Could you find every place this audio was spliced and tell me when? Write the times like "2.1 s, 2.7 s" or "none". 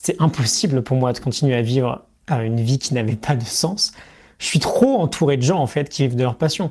none